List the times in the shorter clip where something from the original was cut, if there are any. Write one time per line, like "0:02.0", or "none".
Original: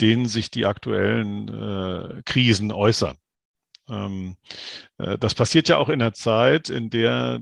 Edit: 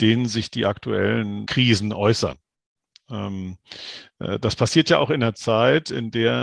0:01.5